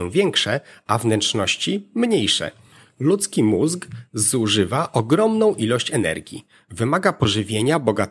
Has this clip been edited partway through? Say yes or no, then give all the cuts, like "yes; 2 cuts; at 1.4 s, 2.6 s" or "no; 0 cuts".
no; 0 cuts